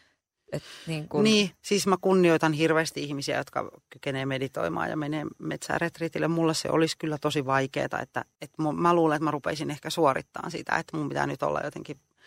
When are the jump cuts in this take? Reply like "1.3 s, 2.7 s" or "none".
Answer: 8.4 s